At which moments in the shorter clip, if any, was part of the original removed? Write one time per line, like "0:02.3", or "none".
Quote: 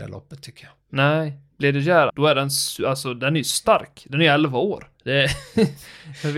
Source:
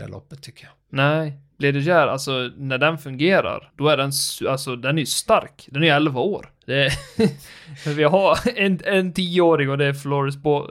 0:02.1